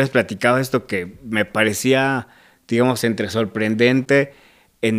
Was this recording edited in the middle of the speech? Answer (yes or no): no